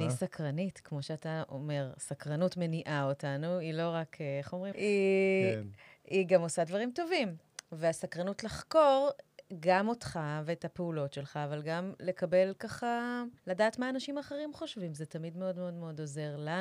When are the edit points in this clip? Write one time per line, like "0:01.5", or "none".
0:04.7
0:13.4